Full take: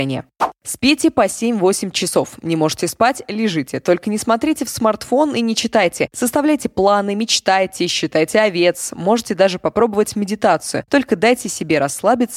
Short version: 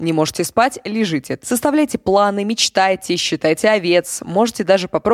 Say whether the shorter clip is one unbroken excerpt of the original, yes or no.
no